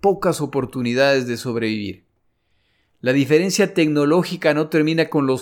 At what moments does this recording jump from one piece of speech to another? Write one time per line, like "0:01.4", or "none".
none